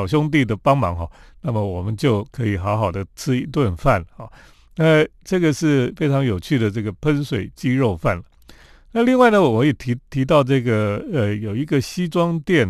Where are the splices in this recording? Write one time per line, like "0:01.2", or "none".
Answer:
none